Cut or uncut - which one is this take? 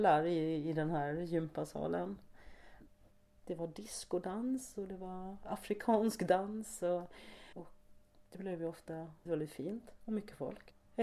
cut